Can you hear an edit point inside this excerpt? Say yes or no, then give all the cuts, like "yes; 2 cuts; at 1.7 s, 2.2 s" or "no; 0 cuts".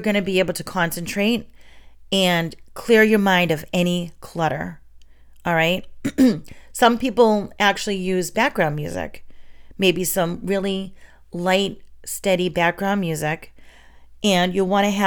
no; 0 cuts